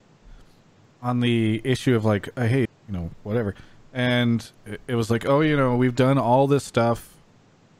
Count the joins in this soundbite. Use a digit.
1